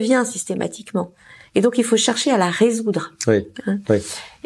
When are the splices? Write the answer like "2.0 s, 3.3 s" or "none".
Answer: none